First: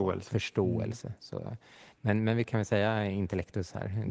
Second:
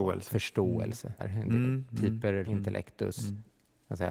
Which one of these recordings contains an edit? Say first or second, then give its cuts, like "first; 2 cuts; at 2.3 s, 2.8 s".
second; 2 cuts; at 1.2 s, 2.5 s